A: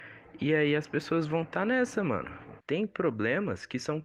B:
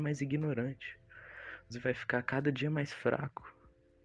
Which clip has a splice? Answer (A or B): A